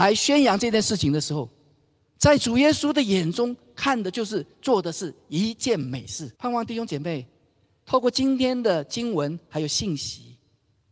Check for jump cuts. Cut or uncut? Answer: cut